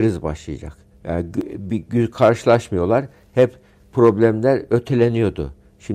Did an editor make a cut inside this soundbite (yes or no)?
yes